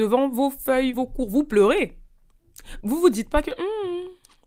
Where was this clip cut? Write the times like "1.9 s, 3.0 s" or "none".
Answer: 0.9 s, 2.8 s